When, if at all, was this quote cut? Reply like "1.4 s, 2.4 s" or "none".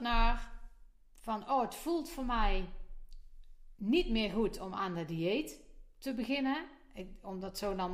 none

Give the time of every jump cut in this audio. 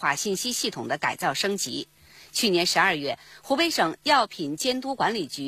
none

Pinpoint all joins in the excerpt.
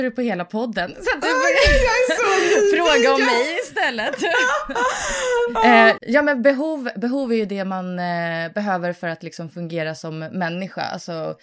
6.0 s

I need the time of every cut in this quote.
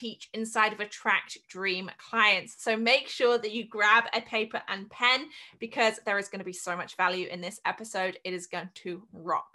none

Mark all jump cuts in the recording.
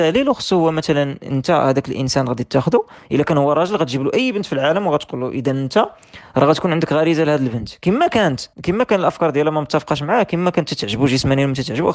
8.5 s

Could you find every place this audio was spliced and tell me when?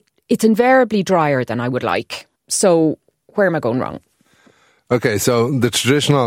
2.4 s

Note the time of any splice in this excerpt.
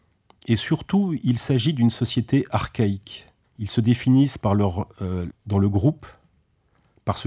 3.4 s, 5.3 s

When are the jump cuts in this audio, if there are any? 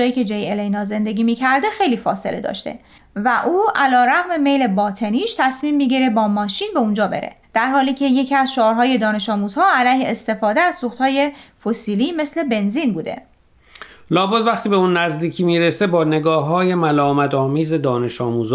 7.4 s

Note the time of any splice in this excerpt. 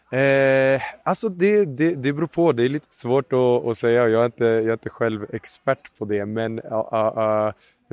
2.8 s

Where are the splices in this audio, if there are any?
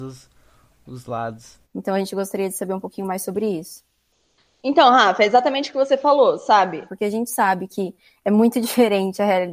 1.6 s, 6.9 s

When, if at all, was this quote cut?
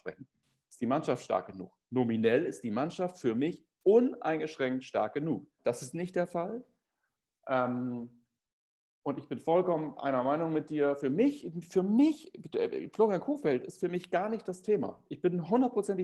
5.6 s

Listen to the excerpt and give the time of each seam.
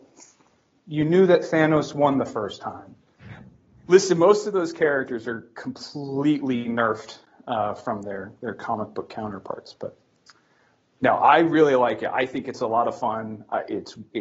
3.2 s

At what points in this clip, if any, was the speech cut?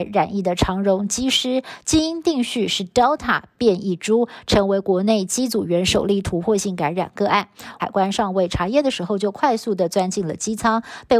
7.8 s

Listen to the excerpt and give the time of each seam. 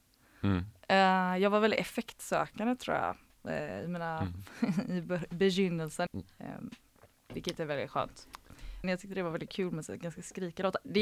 6.1 s, 8.8 s

